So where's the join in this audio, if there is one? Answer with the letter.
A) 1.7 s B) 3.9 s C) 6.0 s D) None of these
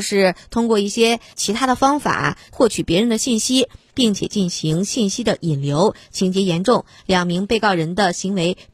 B